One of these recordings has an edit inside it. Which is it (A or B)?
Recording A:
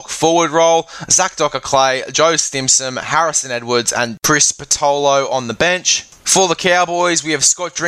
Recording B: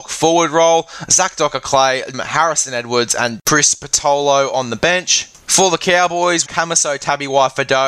B